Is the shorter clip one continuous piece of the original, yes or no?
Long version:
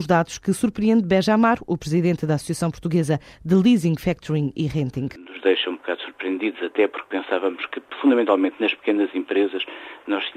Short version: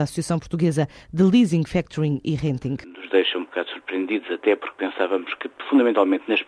yes